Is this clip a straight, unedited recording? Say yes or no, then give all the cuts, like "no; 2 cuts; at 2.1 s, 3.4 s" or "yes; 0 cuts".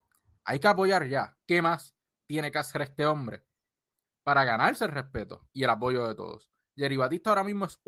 no; 1 cut; at 1.4 s